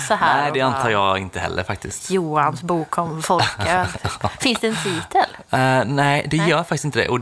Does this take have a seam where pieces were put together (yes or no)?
no